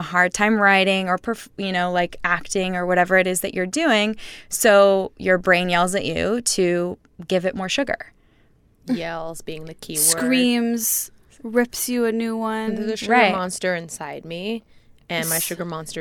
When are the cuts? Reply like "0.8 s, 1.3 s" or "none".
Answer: none